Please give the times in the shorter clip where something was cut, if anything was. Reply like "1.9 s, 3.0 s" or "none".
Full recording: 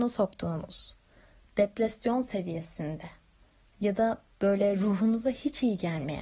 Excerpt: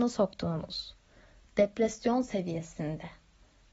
none